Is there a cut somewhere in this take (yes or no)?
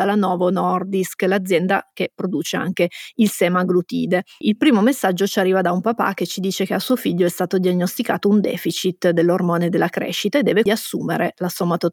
yes